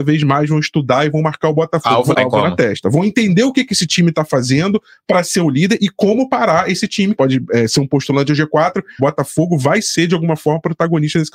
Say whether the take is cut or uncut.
cut